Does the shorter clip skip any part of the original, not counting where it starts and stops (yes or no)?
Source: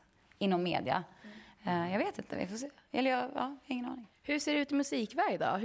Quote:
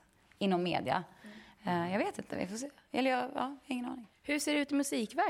no